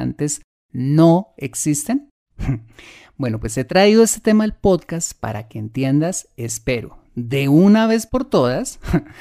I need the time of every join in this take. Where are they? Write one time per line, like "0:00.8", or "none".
0:02.3